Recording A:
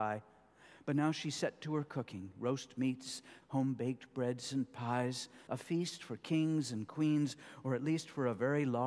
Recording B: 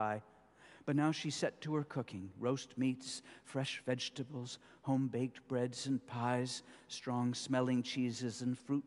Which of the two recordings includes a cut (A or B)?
A